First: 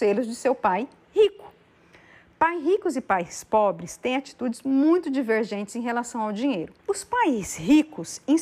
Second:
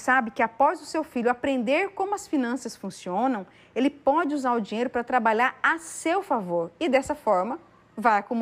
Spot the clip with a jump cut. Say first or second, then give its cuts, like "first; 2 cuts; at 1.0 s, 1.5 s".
first; 1 cut; at 6.8 s